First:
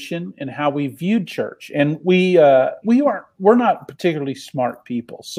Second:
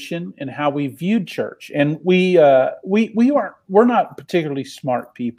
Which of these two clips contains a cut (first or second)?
first